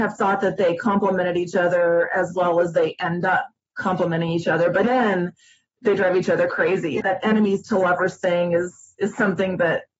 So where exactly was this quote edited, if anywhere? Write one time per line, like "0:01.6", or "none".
0:04.8